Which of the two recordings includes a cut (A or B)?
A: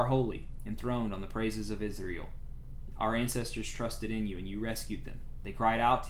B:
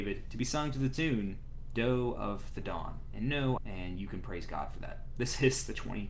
B